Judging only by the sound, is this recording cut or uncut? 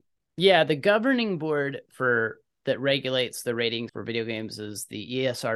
cut